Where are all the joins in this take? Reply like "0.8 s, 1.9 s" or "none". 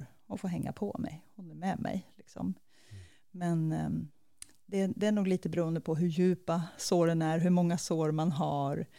none